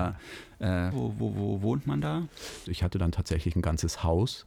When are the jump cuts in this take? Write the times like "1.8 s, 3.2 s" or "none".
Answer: 0.9 s, 2.6 s